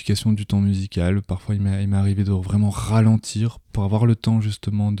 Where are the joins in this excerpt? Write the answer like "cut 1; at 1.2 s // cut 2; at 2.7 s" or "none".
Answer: none